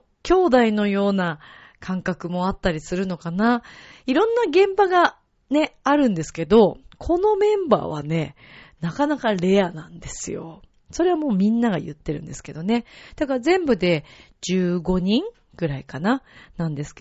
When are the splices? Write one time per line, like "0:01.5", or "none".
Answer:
none